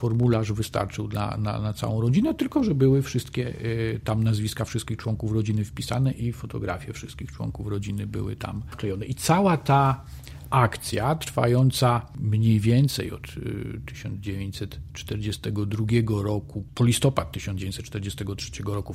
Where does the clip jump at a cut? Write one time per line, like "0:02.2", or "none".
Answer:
none